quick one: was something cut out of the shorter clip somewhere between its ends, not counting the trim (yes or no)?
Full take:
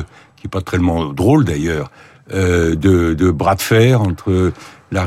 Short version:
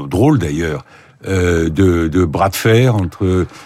no